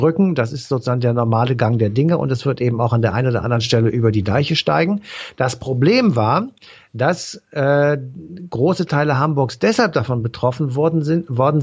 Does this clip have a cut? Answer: no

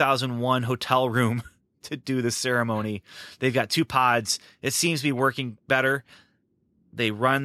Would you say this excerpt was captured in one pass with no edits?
yes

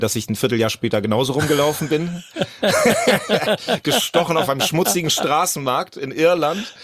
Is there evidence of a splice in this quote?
no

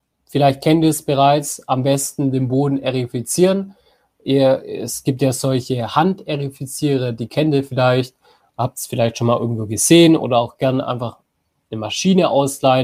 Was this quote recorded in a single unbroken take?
yes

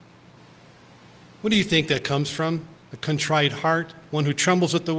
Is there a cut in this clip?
yes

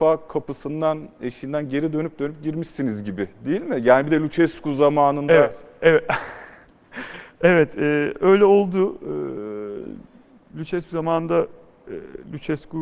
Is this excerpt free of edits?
yes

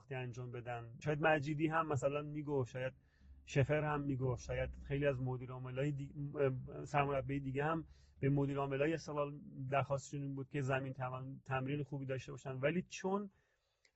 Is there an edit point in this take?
yes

